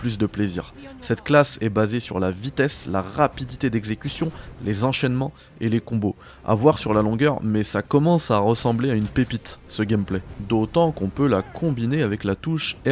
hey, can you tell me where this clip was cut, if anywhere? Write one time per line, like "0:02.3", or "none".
none